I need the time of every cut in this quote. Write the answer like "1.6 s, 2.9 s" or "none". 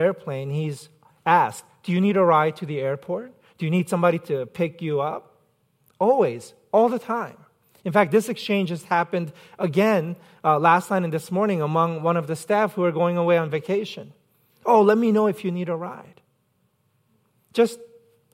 none